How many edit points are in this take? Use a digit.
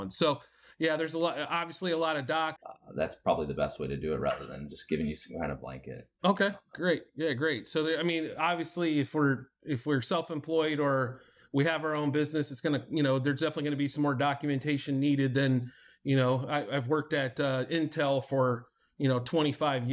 1